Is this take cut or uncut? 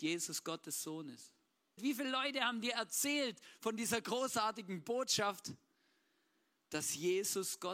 cut